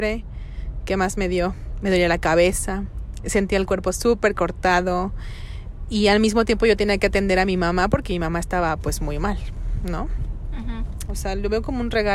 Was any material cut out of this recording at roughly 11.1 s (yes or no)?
yes